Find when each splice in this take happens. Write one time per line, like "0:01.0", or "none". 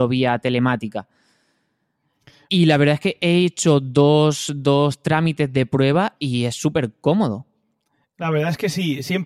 none